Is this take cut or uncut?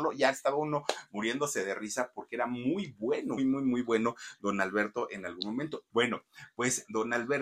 cut